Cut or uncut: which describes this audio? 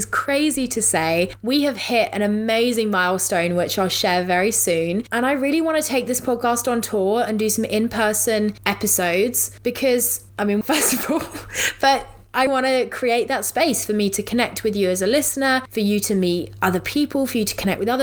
cut